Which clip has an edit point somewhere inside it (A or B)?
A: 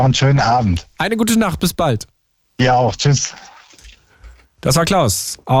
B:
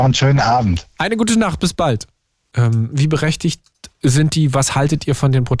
B